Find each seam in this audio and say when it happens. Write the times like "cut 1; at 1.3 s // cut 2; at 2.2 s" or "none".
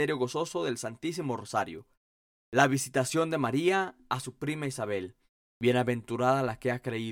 cut 1; at 5.4 s